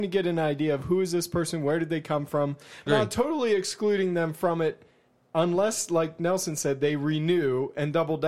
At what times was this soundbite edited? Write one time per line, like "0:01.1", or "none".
0:02.9